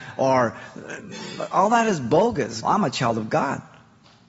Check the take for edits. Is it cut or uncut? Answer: cut